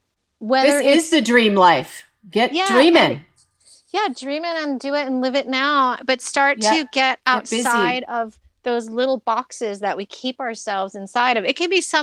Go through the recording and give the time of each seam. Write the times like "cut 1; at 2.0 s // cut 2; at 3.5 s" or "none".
none